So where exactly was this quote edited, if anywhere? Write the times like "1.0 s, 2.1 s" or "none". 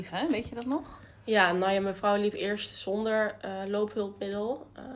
none